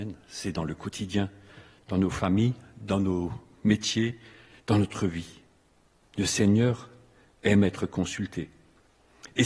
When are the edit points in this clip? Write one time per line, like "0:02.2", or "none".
none